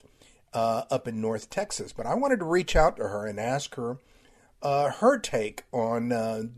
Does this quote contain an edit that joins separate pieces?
no; 0 cuts

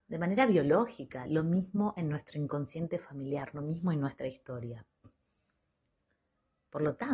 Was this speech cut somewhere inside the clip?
no; 0 cuts

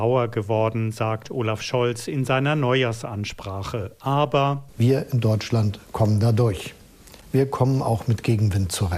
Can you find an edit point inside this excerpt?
no; 0 cuts

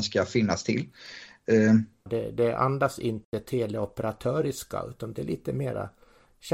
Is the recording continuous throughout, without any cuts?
no; 1 cut; at 2.1 s

